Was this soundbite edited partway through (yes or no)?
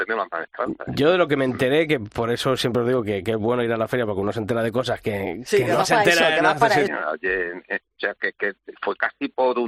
yes